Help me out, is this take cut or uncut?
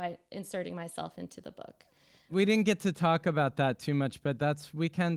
uncut